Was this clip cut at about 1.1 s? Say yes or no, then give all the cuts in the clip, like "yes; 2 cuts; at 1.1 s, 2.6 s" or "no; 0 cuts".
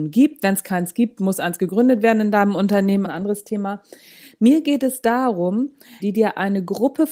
no; 2 cuts; at 3.0 s, 6.0 s